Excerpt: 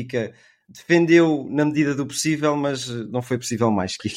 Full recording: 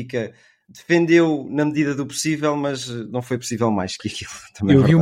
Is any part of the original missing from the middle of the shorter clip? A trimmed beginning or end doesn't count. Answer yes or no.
no